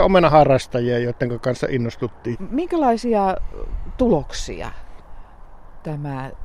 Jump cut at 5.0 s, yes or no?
no